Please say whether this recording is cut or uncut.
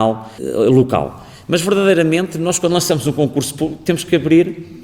uncut